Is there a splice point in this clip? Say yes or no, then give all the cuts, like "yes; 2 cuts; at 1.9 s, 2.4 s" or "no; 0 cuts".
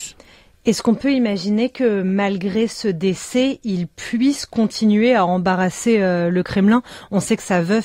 no; 0 cuts